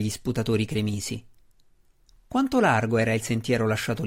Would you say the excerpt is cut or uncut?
cut